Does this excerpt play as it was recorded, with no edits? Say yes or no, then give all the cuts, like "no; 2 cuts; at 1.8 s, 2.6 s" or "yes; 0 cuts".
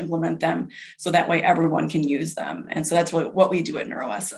yes; 0 cuts